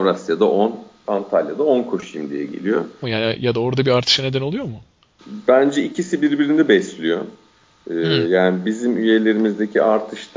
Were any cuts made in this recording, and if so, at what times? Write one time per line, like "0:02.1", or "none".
0:01.0
0:03.0

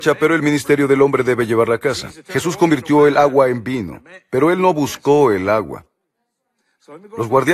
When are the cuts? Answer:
none

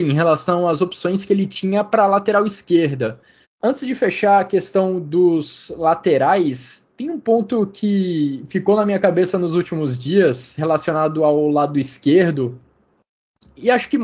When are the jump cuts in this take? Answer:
0:03.4

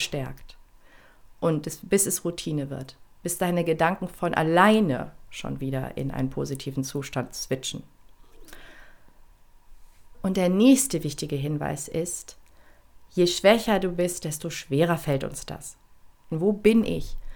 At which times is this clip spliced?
0:10.1
0:16.3

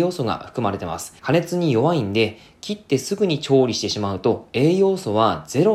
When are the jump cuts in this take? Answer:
0:01.2

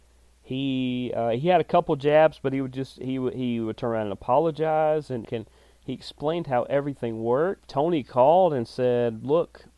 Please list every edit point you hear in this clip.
0:05.2
0:07.6

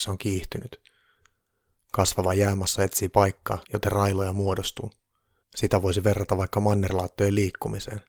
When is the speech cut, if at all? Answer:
0:03.6
0:05.4

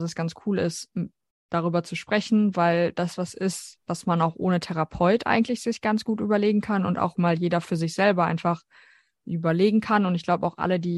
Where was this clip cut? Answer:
none

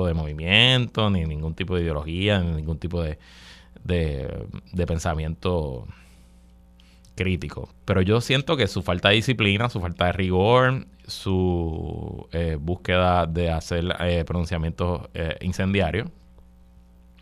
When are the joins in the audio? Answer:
0:07.7

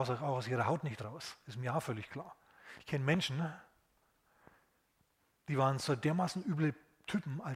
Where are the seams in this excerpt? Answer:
none

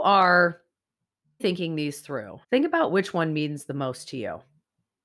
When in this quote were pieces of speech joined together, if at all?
0:01.4
0:02.4

